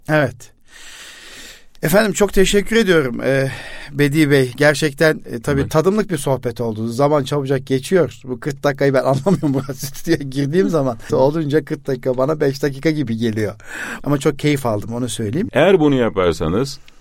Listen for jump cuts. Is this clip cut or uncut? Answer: cut